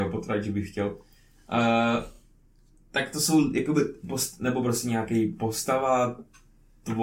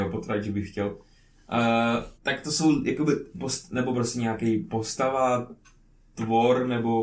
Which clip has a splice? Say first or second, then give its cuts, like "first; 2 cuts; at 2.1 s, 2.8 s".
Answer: second; 1 cut; at 2.1 s